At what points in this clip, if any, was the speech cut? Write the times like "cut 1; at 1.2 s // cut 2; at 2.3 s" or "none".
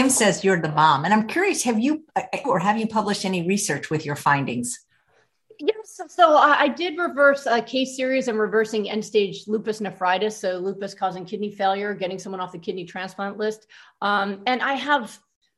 cut 1; at 2.4 s